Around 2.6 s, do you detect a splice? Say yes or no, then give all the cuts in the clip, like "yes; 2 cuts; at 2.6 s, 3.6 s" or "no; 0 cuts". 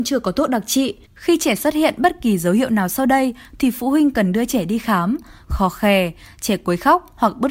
no; 2 cuts; at 1.0 s, 5.4 s